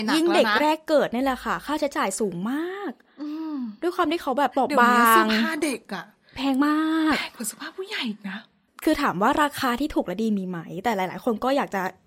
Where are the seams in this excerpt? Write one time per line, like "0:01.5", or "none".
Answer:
0:04.5

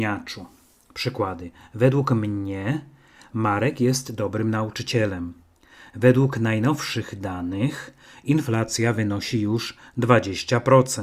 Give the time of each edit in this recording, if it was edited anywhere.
none

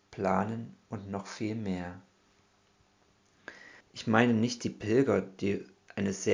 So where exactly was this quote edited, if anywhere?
0:03.8

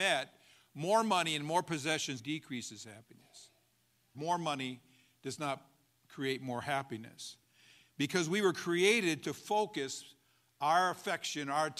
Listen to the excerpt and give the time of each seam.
0:02.2
0:04.1

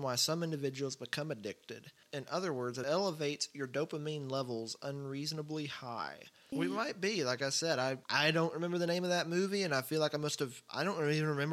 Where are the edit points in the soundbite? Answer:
0:02.0
0:06.5

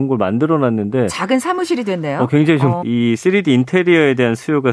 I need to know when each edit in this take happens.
0:02.8

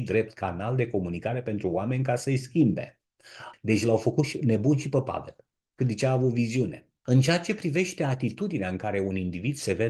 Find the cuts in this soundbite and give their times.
0:03.5

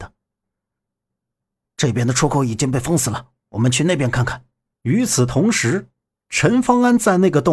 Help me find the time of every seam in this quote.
0:04.7

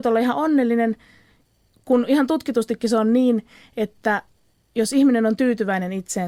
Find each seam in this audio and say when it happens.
none

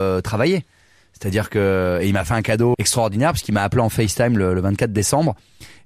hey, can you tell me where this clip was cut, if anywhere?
0:02.7

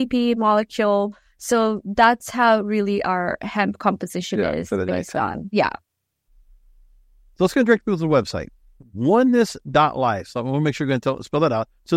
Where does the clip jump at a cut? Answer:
none

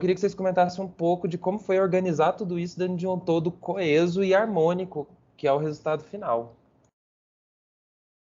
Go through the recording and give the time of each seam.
none

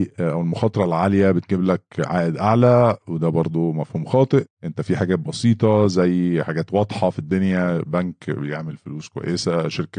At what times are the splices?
0:04.5

